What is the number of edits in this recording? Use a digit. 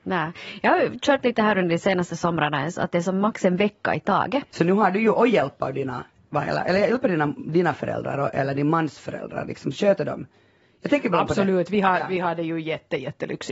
1